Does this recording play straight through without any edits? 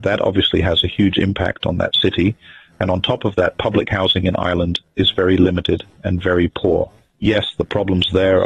yes; 0 cuts

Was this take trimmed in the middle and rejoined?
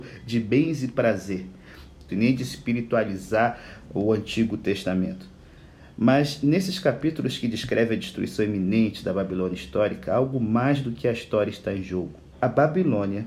yes; 2 cuts; at 2.1 s, 12.3 s

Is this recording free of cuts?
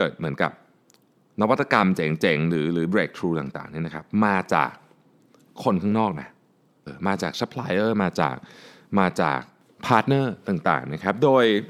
no; 1 cut; at 6.9 s

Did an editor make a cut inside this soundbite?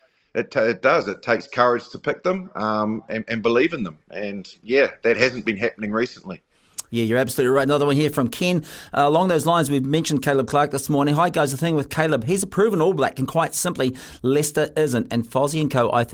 no; 0 cuts

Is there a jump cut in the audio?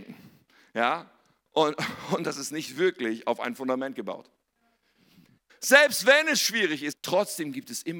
yes; 2 cuts; at 5.5 s, 6.9 s

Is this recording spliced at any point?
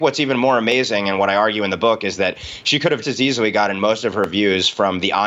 yes; 1 cut; at 3.0 s

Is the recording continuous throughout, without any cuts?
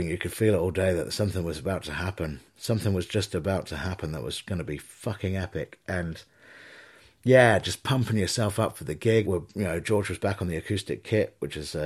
no; 1 cut; at 9.2 s

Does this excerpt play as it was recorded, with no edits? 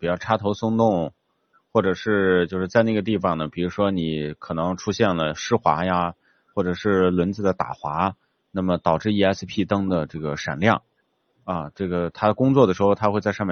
yes; 0 cuts

